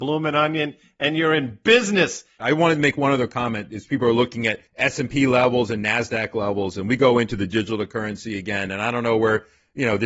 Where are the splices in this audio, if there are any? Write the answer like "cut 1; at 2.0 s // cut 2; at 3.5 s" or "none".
cut 1; at 4.7 s

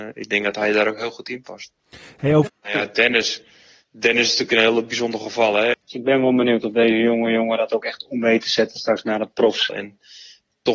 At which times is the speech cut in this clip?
cut 1; at 2.5 s // cut 2; at 5.7 s // cut 3; at 9.7 s

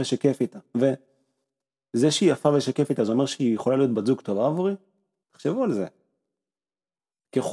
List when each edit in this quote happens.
cut 1; at 5.2 s

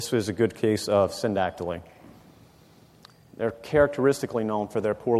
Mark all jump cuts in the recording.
none

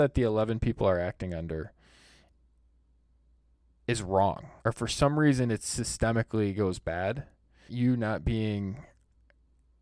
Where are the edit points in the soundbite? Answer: cut 1; at 4.6 s // cut 2; at 7.7 s

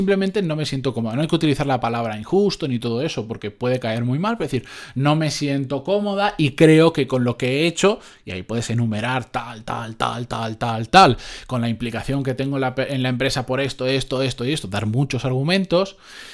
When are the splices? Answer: cut 1; at 10.9 s

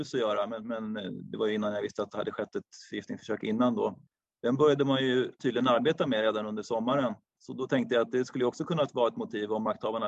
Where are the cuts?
cut 1; at 4.3 s

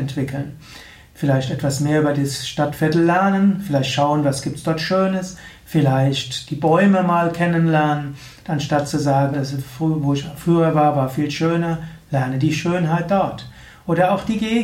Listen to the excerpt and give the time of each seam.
cut 1; at 9.3 s

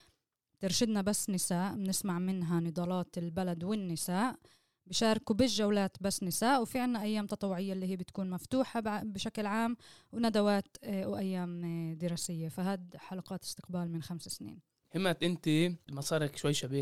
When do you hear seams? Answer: none

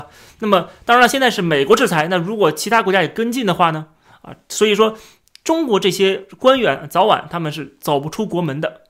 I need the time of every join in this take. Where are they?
none

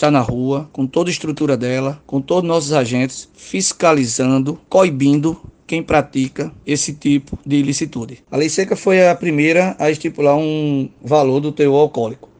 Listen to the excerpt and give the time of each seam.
cut 1; at 8.2 s

